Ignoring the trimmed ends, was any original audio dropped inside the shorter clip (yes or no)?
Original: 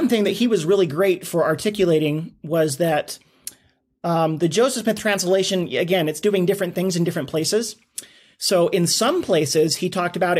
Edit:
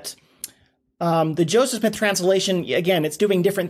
no